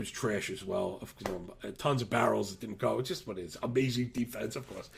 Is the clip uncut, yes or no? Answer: no